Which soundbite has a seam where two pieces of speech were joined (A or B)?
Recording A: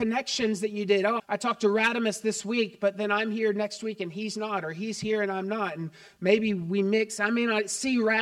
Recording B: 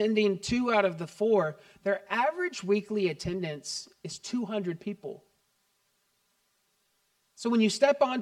A